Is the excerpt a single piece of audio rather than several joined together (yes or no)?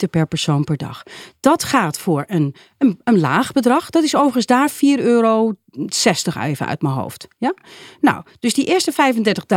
yes